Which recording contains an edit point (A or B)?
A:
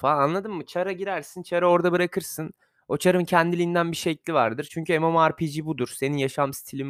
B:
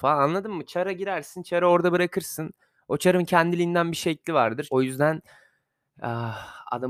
B